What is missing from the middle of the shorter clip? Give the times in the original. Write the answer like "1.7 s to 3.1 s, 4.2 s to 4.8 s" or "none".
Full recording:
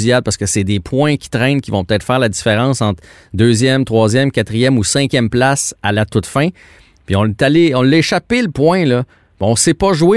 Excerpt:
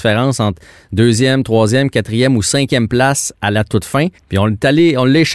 6.6 s to 6.9 s

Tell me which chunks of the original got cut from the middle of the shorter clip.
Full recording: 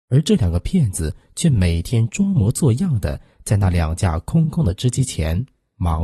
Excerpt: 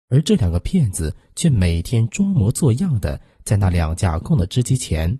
4.2 s to 4.5 s

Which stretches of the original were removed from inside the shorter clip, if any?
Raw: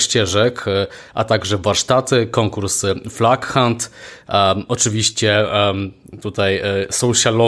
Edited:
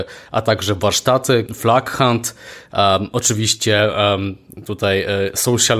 2.3 s to 3.0 s

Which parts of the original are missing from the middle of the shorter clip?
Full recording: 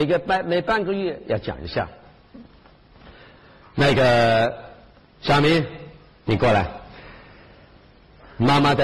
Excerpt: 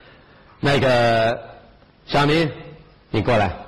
none

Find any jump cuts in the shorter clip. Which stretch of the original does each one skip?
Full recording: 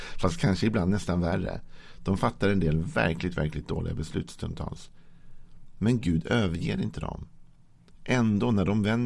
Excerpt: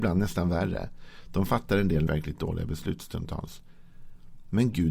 2.8 s to 3.4 s

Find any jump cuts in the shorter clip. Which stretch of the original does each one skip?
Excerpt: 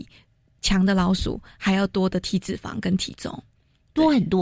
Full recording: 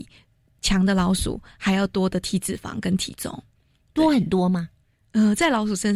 none

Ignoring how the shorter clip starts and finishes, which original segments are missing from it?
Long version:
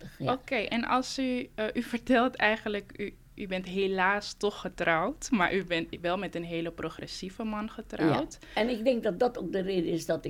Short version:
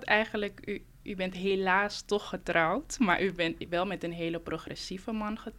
none

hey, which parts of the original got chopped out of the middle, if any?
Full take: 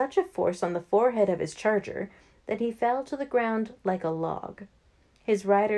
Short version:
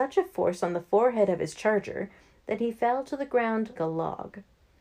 3.8 s to 4.0 s

